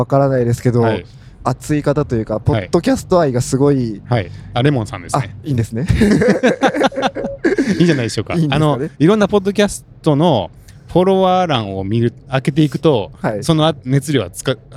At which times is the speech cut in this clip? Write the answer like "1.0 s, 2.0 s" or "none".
1.4 s

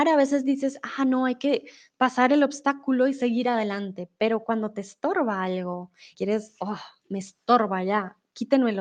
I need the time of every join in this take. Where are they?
1.0 s, 6.1 s

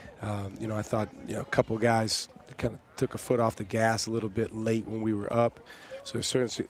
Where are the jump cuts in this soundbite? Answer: none

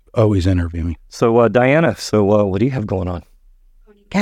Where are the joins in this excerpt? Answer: 1.0 s

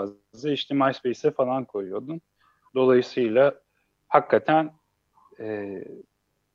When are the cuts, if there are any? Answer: 2.7 s

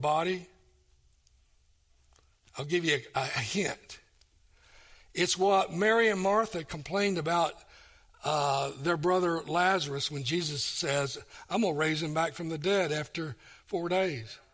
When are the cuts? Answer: none

